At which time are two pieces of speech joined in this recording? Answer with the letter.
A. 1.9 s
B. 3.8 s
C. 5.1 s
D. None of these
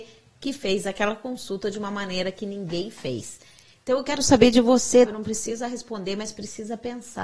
C